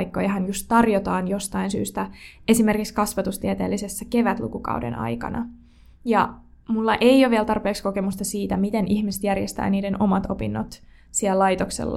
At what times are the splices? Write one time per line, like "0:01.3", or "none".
none